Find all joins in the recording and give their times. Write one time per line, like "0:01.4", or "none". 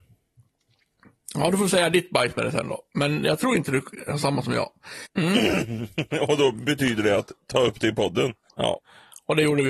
0:05.0
0:08.5